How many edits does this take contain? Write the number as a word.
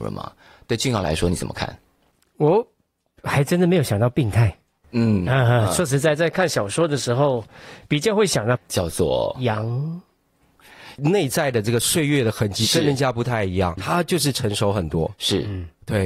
three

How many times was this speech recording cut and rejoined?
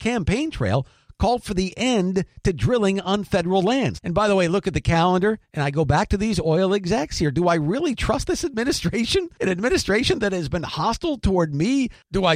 two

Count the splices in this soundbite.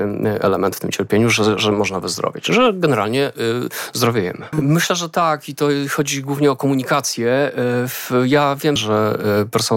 two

